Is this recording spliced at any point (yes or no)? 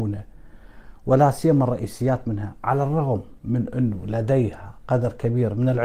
yes